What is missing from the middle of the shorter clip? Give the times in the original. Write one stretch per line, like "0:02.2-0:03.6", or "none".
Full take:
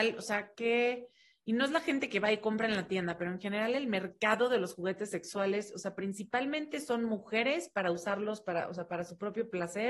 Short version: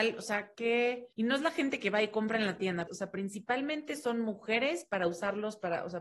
0:01.1-0:01.4
0:03.2-0:05.7